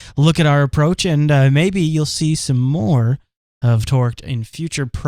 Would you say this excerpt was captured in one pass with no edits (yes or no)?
yes